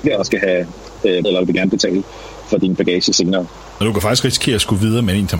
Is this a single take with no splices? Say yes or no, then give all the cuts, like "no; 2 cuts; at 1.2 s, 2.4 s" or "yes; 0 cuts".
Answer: no; 2 cuts; at 1.2 s, 3.8 s